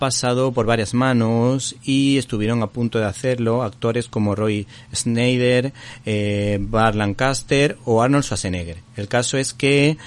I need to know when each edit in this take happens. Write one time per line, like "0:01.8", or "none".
none

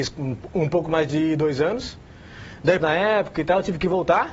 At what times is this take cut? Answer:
0:02.8

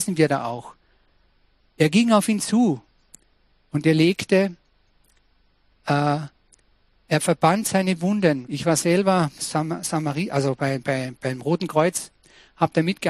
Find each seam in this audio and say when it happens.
0:08.5

